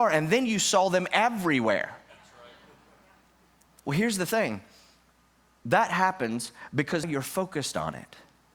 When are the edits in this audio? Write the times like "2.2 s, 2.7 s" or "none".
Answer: 7.0 s